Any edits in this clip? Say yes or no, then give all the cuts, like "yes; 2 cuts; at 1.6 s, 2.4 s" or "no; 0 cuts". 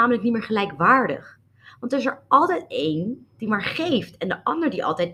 no; 0 cuts